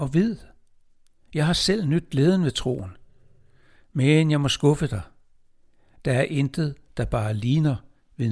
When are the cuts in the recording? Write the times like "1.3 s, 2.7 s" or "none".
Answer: none